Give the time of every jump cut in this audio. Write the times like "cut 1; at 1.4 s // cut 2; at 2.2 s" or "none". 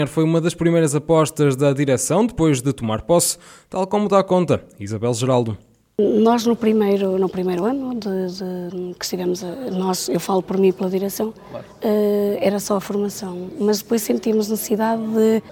none